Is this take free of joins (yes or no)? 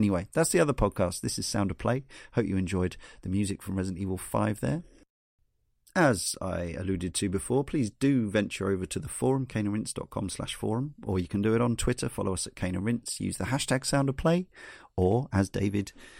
yes